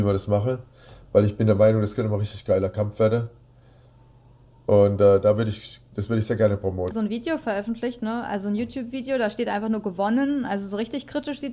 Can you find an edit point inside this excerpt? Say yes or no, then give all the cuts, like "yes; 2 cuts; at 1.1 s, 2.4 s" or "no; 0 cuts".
yes; 1 cut; at 6.9 s